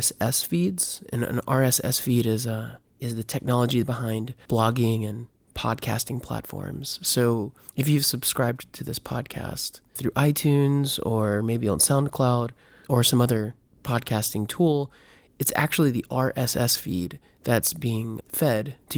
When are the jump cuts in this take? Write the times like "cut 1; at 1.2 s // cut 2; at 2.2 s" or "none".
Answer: none